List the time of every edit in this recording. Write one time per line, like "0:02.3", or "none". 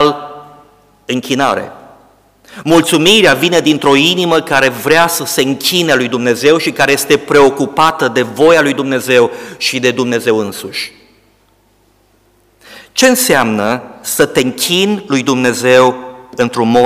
none

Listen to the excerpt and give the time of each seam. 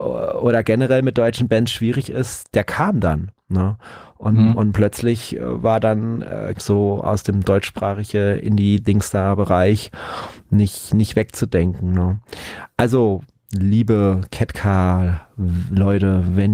0:06.6

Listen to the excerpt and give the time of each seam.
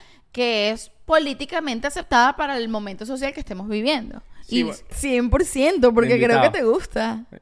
0:04.9

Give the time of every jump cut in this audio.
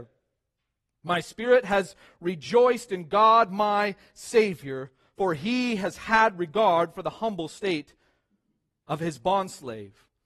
none

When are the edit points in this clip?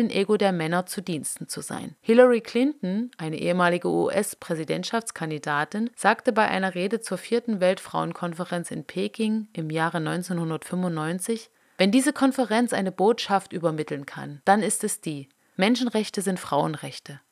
0:02.0

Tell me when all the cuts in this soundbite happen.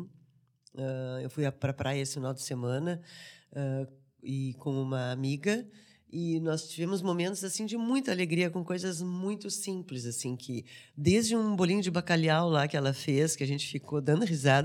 none

